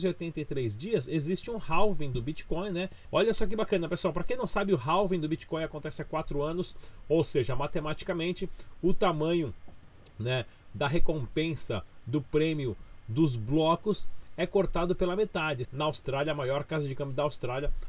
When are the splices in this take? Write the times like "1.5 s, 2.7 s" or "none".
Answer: 3.0 s, 15.6 s

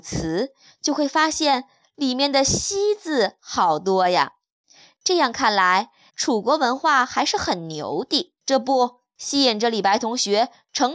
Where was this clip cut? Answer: 6.1 s, 8.4 s

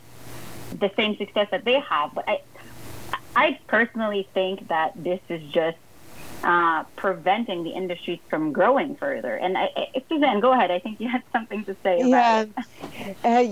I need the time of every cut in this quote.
none

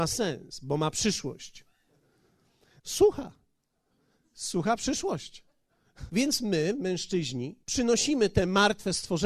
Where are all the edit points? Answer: 2.8 s, 6.1 s, 7.6 s

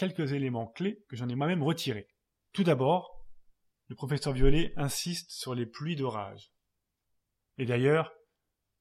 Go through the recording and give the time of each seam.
7.4 s

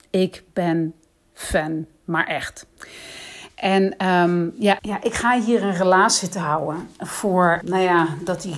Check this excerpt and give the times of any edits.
4.8 s, 7.6 s

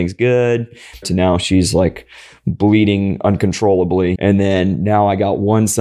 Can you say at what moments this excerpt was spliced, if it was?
1.0 s, 4.2 s

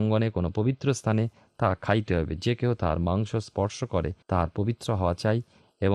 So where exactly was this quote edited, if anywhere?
4.2 s

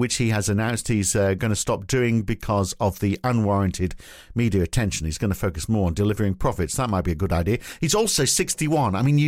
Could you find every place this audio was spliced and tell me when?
none

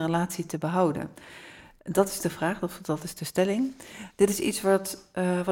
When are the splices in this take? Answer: none

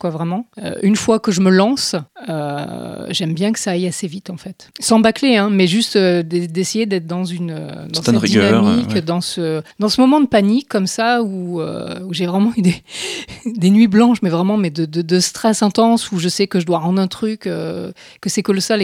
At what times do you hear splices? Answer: 9.7 s

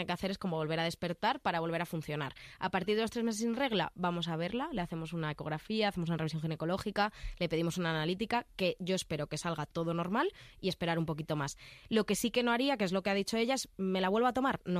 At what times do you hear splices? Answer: none

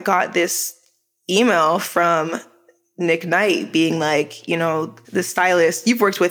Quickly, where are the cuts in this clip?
5.0 s

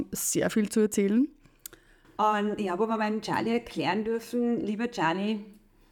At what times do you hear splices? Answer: 2.0 s

